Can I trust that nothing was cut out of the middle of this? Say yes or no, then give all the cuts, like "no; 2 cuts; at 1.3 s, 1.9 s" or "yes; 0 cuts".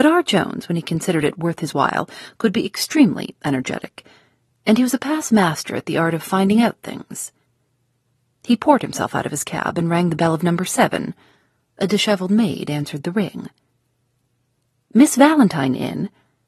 yes; 0 cuts